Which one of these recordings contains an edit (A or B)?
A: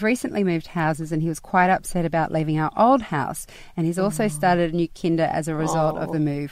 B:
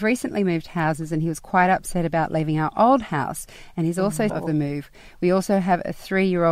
B